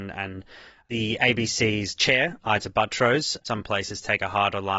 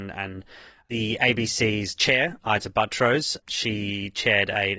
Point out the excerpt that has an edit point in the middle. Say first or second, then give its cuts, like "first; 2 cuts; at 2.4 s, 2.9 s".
first; 1 cut; at 3.4 s